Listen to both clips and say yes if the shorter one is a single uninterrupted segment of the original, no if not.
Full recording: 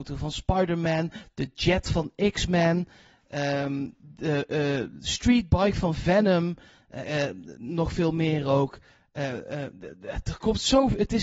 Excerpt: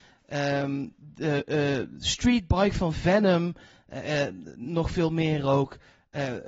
yes